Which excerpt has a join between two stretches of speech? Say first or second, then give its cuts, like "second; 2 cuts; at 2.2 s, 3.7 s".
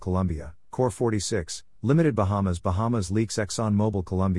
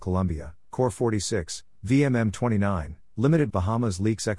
second; 2 cuts; at 1.7 s, 3.5 s